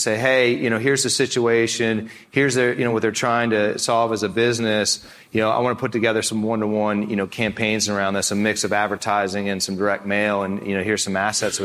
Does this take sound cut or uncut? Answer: uncut